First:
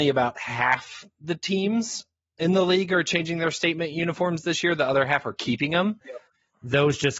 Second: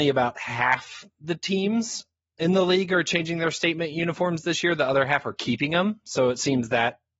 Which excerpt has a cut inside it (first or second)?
first